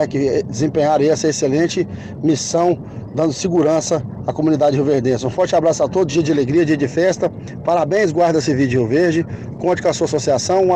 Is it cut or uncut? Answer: uncut